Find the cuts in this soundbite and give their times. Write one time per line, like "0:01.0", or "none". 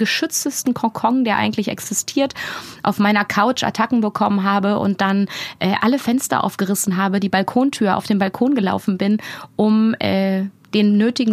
none